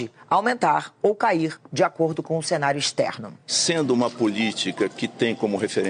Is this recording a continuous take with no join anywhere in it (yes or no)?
yes